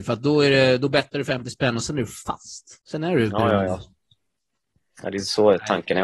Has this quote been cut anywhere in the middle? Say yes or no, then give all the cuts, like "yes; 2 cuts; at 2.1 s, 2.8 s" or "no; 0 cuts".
yes; 1 cut; at 2.8 s